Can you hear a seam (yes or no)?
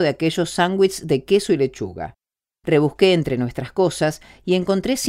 no